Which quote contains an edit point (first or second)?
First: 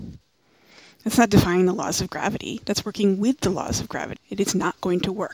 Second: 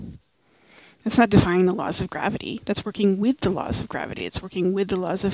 first